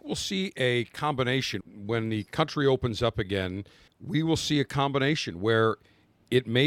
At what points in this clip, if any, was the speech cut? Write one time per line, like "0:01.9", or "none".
0:01.6
0:03.9